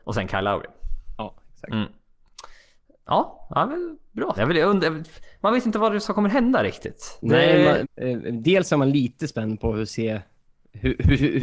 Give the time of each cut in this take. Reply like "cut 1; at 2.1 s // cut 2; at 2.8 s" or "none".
cut 1; at 4.4 s // cut 2; at 7.8 s